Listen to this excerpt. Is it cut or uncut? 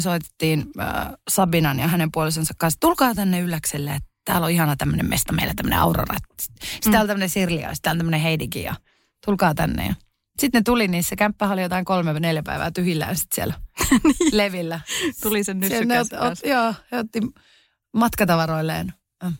uncut